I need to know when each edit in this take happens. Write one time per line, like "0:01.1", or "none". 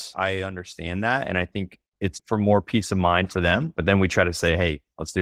0:02.1
0:03.7